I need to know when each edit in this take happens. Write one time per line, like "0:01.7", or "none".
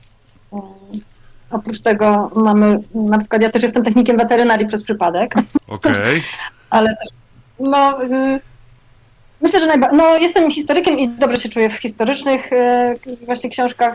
none